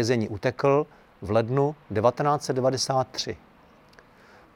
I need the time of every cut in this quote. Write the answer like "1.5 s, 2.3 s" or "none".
none